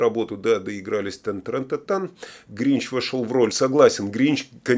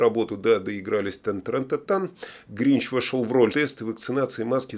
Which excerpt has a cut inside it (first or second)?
second